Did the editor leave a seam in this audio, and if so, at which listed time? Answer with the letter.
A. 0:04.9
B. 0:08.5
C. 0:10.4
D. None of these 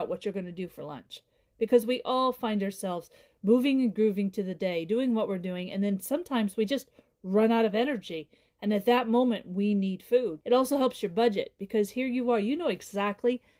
C